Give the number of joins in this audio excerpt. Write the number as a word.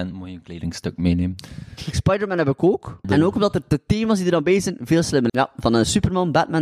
three